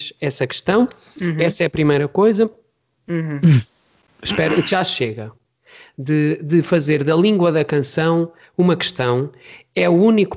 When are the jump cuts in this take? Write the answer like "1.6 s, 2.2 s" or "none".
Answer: 3.0 s